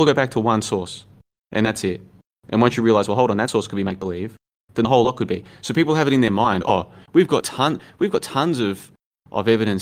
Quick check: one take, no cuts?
yes; 0 cuts

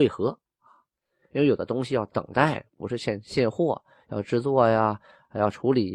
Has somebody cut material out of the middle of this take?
no; 0 cuts

